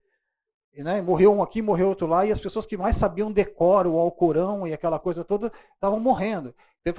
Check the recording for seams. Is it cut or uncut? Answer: uncut